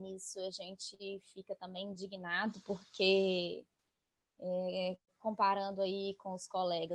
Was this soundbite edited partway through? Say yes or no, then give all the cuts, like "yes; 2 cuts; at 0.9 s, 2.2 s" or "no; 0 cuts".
no; 0 cuts